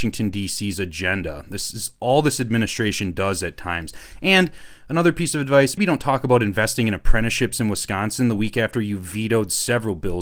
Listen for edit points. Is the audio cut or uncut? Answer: cut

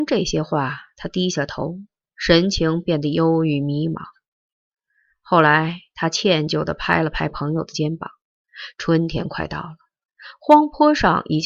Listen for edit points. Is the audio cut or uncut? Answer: cut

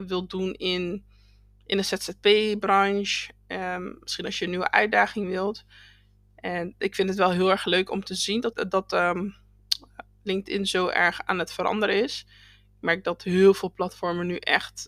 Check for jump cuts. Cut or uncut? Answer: cut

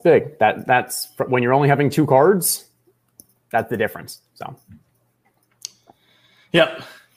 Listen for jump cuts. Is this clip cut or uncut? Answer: uncut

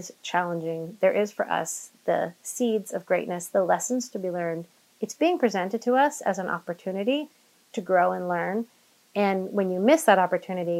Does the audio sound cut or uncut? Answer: uncut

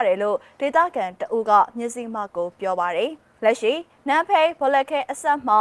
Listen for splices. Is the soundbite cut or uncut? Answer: cut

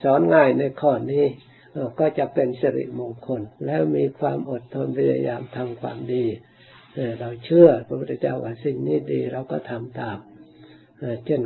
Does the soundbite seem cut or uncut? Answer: cut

